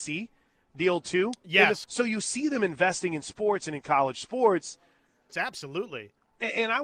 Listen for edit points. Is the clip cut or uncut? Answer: cut